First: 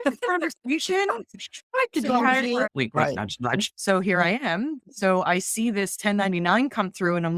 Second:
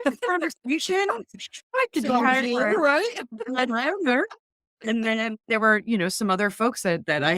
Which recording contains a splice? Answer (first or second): first